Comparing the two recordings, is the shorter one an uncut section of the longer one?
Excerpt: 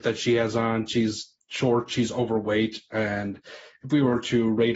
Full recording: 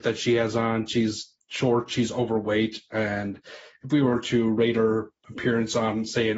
yes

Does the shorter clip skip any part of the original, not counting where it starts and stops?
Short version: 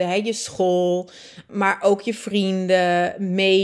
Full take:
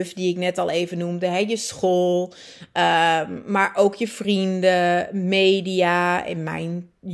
yes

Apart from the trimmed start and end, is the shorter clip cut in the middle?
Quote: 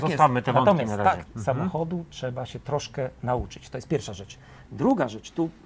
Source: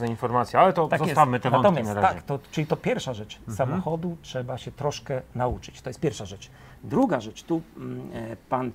yes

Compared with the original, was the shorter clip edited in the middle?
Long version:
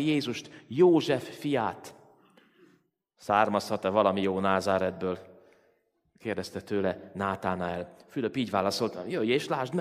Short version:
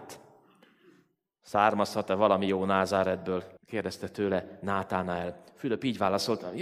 yes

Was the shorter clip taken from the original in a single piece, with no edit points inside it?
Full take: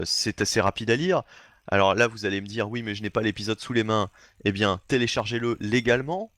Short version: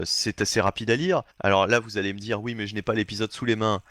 no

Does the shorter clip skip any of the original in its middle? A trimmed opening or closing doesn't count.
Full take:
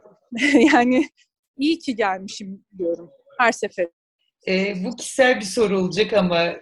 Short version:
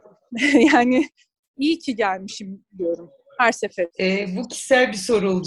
yes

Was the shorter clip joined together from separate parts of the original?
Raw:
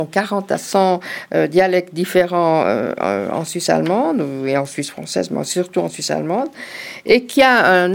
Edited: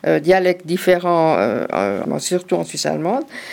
yes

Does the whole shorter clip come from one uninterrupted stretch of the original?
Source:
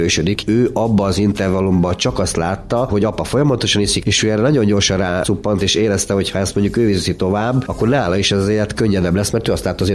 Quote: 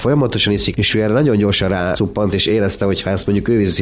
yes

